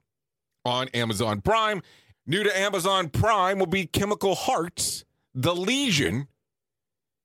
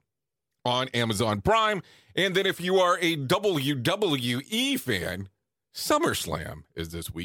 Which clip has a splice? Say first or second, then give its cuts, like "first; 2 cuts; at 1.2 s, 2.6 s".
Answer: first; 1 cut; at 2.1 s